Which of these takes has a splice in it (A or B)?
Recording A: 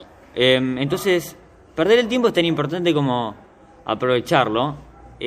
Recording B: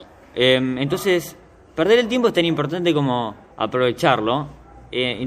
B